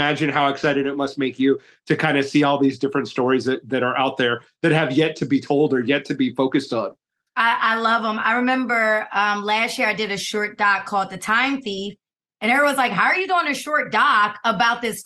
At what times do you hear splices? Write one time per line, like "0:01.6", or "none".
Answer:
none